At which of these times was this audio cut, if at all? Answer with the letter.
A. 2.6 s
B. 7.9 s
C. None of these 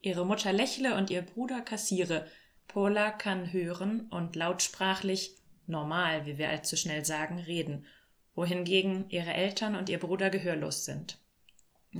A